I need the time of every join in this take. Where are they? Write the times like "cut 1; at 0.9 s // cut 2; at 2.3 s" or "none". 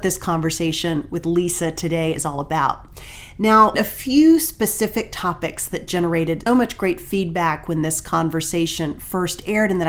cut 1; at 3.7 s // cut 2; at 6.5 s